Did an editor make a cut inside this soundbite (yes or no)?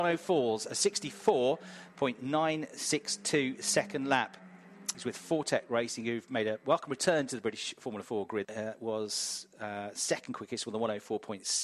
yes